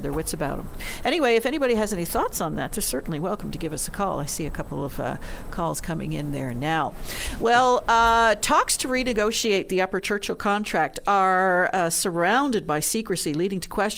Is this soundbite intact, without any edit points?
yes; 0 cuts

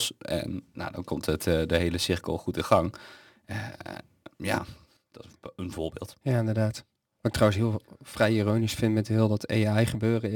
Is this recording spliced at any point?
no; 0 cuts

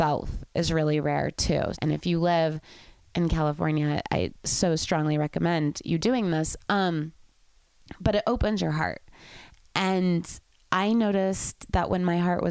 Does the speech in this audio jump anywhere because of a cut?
yes; 1 cut; at 1.7 s

